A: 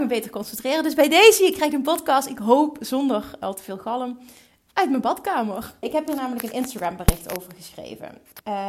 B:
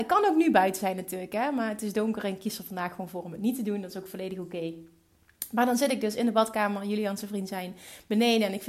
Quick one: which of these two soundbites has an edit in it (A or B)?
A